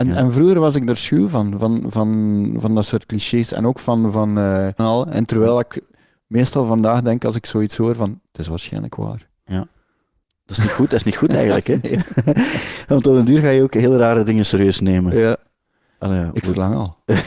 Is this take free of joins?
no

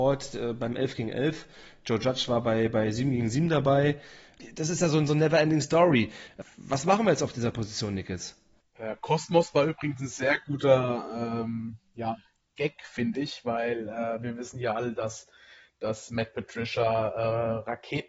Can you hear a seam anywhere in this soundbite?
no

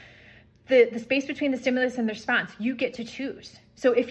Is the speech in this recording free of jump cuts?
yes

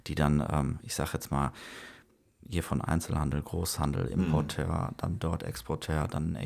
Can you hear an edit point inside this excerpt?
no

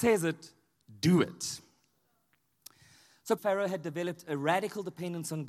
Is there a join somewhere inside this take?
yes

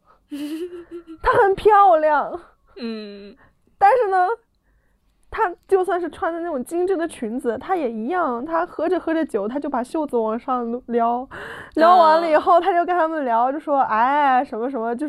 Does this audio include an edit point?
no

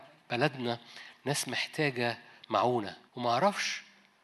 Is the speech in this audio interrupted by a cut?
yes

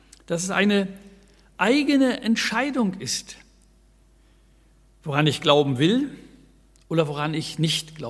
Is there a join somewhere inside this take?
no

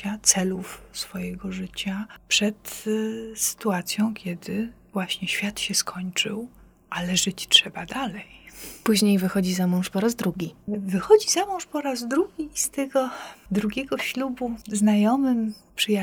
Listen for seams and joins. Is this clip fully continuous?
yes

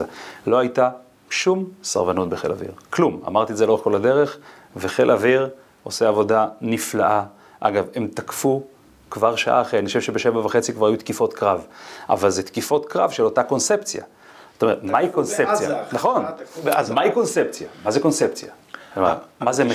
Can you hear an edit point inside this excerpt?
no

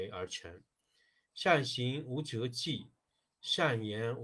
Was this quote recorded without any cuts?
no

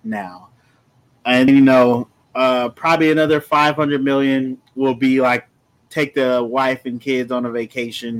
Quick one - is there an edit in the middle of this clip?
yes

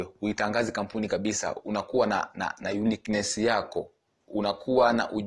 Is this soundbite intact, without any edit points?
yes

